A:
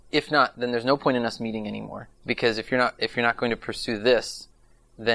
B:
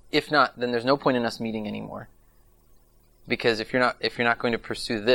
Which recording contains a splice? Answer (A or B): A